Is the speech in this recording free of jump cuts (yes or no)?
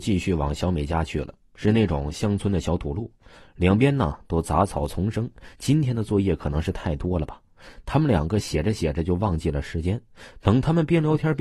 yes